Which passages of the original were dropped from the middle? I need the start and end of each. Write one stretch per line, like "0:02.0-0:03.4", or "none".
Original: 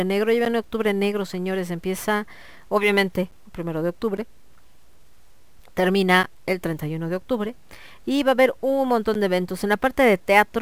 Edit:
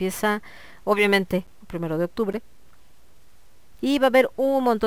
0:05.6-0:08.0